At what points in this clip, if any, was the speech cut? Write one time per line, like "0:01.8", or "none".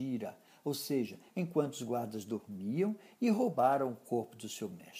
0:01.3